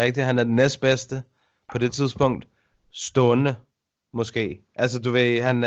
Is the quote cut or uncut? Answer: uncut